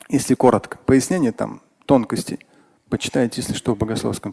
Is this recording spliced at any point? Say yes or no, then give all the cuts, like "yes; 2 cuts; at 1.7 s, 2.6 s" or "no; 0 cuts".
no; 0 cuts